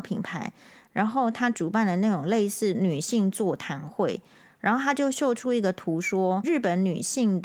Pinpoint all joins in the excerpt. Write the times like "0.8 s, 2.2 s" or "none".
6.4 s